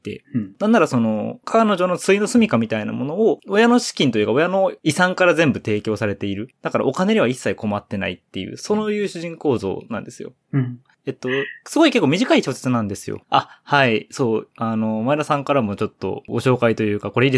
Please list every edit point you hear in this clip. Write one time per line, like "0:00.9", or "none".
0:10.8
0:13.2